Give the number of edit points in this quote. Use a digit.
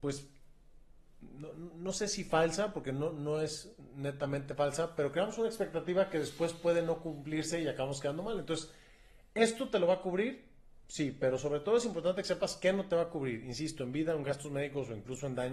0